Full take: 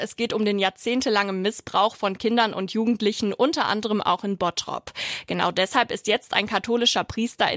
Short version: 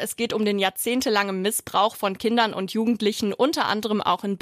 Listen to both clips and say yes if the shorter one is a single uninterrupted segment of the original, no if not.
yes